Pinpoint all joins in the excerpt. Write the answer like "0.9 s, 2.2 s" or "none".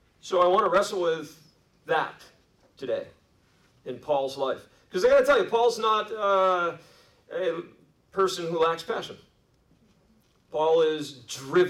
none